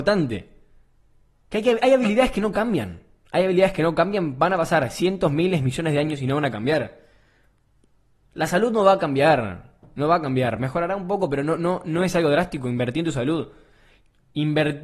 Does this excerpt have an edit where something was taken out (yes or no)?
no